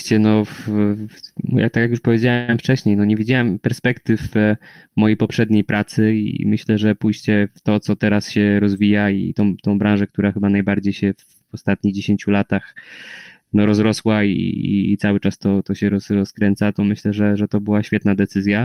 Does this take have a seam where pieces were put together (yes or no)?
no